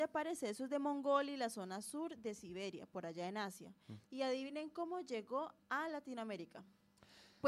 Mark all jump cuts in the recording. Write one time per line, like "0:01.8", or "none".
0:04.0